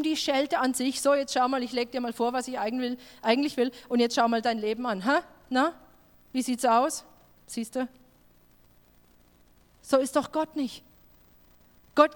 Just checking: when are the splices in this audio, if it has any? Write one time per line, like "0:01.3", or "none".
none